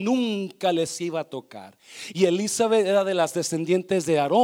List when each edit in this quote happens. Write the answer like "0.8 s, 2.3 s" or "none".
2.1 s